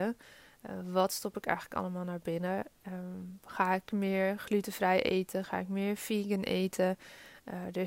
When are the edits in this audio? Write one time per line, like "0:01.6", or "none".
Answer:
none